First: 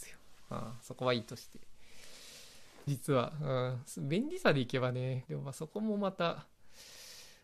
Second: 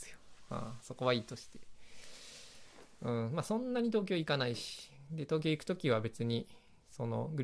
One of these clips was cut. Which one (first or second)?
first